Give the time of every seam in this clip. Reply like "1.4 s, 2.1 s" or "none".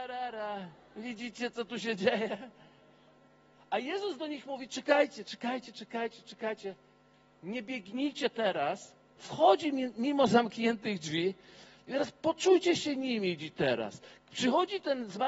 9.2 s

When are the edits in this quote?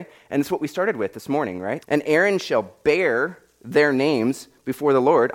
1.8 s

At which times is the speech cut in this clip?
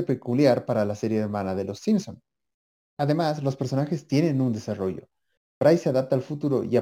2.9 s

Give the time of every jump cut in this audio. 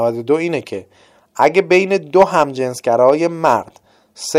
none

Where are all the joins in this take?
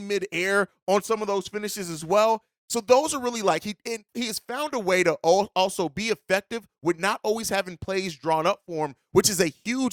4.1 s

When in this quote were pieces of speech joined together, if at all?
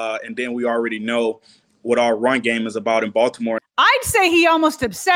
3.6 s

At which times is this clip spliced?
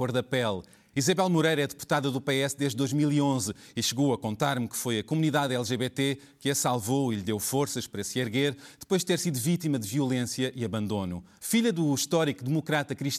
0.9 s, 11.4 s

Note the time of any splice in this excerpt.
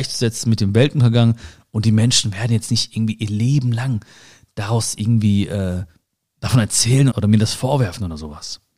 7.1 s

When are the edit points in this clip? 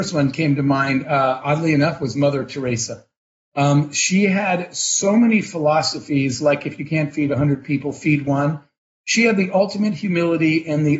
none

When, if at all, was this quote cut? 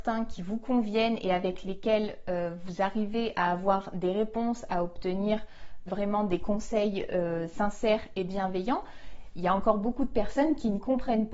5.9 s, 9.3 s

